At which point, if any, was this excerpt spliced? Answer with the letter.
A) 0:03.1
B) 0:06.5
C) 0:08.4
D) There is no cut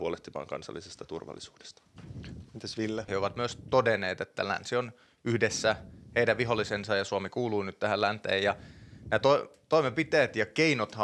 A